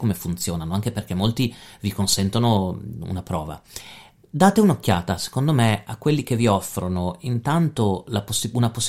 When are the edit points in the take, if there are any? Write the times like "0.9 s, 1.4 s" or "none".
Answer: none

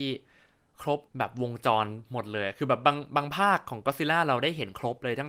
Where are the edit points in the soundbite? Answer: 1.1 s

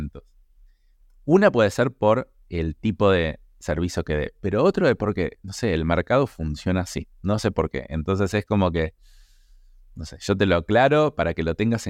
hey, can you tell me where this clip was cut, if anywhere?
none

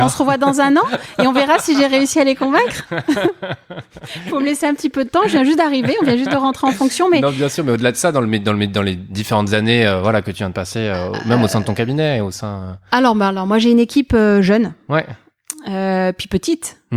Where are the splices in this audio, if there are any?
none

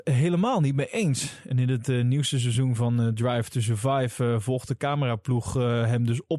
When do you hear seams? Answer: none

